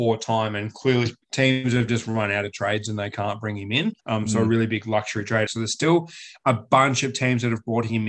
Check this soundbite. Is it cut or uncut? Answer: cut